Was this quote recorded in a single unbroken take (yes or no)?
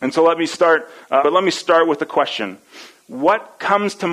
no